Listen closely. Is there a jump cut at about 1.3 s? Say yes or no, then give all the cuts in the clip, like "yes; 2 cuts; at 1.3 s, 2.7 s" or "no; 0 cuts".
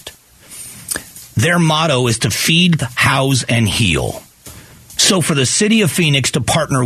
no; 2 cuts; at 2.8 s, 5.0 s